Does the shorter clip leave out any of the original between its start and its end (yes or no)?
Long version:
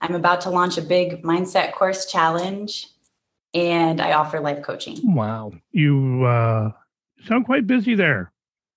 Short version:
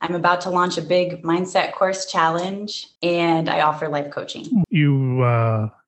yes